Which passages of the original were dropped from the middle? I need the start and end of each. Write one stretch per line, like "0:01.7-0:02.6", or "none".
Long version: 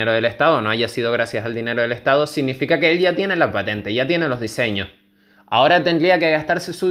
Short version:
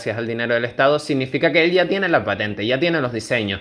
none